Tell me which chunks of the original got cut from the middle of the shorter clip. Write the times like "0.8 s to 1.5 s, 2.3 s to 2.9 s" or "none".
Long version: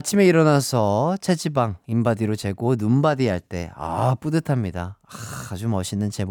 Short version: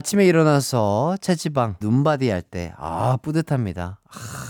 1.8 s to 2.8 s